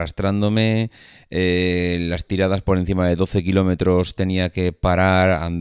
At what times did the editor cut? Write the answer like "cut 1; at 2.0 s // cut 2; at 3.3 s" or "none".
none